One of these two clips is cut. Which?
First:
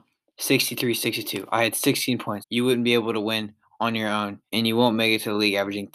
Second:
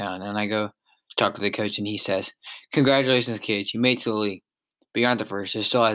first; 2 cuts; at 2.4 s, 4.5 s

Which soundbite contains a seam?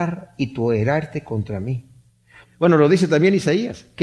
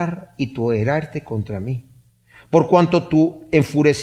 first; 1 cut; at 2.4 s

